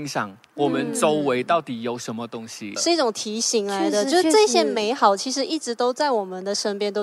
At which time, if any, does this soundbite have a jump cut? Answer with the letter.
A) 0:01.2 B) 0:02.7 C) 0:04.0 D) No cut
D